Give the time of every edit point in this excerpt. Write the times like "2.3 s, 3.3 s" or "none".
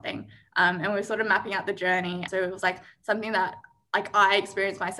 2.3 s